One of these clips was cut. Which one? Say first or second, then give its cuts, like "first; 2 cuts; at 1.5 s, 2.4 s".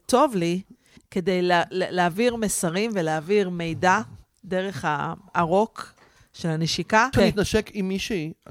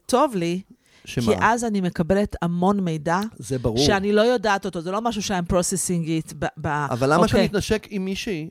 first; 2 cuts; at 1.0 s, 7.1 s